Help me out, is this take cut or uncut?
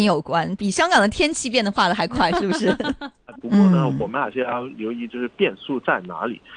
cut